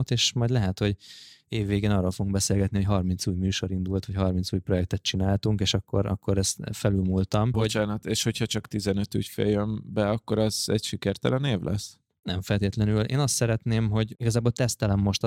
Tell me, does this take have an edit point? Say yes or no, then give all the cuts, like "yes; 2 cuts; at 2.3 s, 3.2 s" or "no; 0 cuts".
yes; 1 cut; at 7.5 s